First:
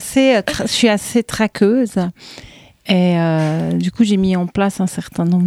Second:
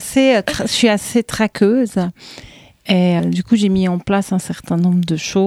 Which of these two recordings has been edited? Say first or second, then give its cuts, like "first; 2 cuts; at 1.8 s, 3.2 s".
second; 1 cut; at 3.2 s